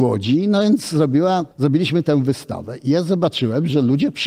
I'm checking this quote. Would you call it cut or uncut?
cut